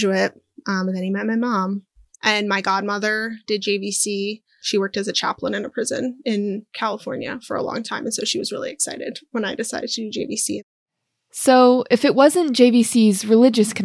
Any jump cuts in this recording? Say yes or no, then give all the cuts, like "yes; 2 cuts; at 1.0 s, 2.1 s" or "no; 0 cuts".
no; 0 cuts